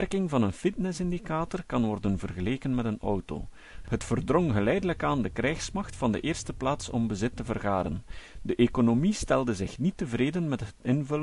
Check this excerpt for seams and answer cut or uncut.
cut